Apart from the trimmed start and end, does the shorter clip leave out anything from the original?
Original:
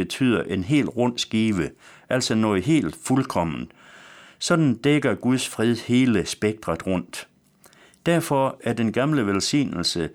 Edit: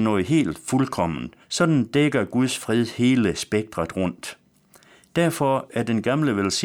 yes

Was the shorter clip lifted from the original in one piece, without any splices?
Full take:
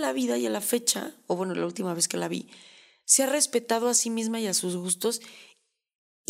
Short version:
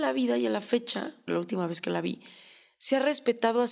no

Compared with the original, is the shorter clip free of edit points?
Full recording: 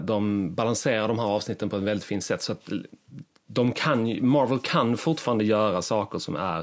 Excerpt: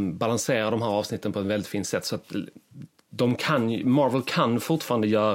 yes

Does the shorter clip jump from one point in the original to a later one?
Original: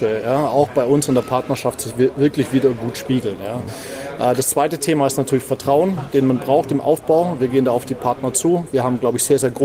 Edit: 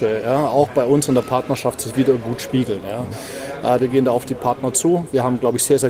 yes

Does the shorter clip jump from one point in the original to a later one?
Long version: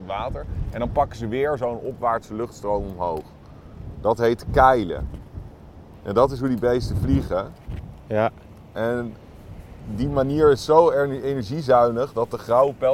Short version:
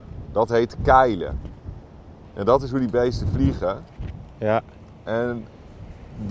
no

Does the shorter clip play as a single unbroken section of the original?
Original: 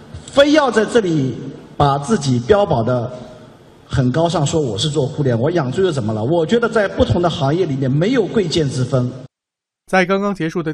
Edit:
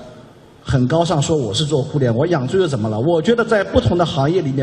yes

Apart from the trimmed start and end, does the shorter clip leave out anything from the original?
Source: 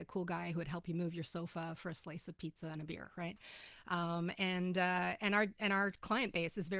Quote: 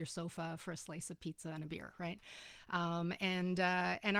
no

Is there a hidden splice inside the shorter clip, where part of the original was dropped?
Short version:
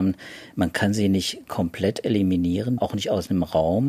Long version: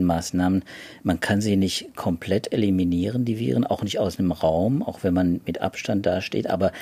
yes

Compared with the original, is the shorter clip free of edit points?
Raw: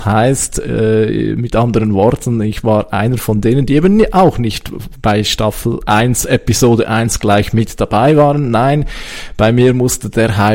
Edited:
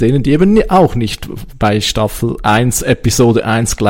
yes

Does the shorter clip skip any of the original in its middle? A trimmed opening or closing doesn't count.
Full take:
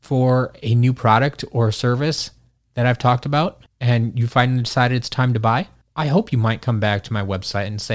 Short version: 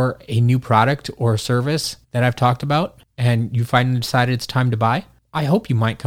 yes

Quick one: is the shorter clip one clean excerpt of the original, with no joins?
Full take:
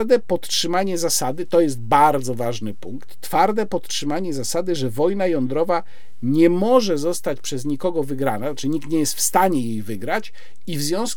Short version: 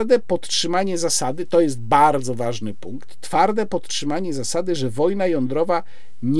yes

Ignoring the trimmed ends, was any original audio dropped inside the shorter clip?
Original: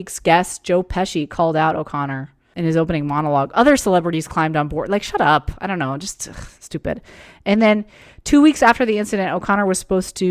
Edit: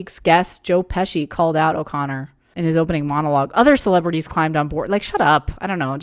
no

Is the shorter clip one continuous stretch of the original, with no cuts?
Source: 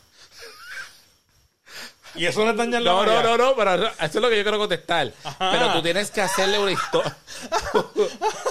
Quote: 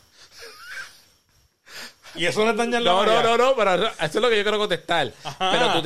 yes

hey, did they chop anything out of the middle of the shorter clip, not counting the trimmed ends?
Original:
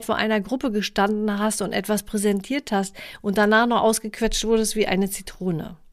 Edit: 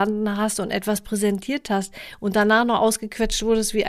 no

